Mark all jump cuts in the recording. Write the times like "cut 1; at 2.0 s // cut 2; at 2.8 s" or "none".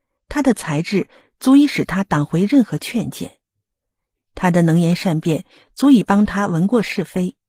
none